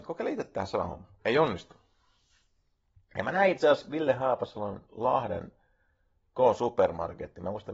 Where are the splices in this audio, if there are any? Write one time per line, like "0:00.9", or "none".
none